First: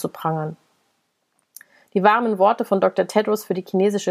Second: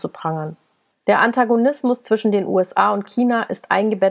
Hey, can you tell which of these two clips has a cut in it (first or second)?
second